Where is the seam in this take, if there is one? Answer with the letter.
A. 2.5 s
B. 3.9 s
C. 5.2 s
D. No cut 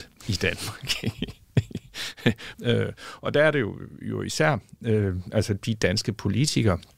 A